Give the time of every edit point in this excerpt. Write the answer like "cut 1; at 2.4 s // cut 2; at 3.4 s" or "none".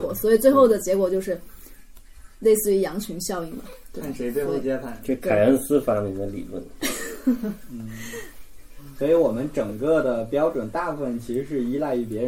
none